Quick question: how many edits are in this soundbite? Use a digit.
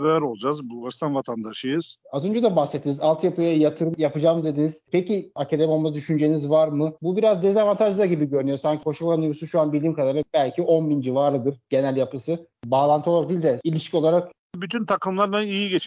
3